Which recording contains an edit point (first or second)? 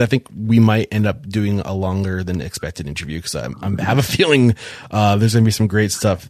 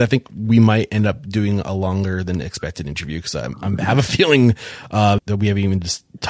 second